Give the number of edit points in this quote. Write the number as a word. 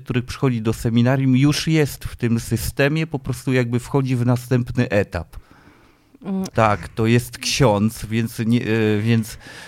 one